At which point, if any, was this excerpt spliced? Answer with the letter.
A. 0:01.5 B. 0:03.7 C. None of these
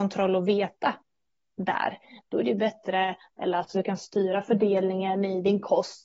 B